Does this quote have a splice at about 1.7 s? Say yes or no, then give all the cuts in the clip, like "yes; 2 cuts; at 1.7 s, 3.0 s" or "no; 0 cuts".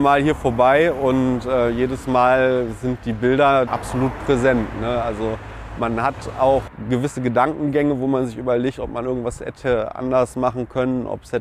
no; 1 cut; at 3.7 s